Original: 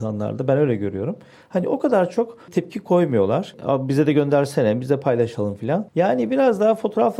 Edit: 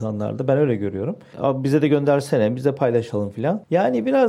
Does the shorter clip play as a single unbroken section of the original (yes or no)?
no